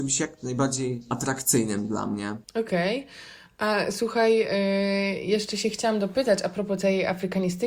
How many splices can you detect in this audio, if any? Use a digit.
1